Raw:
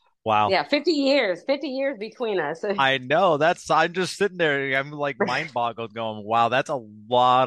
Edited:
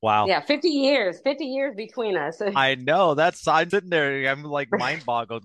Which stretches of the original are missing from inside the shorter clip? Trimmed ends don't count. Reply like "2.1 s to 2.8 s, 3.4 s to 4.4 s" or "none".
3.9 s to 4.2 s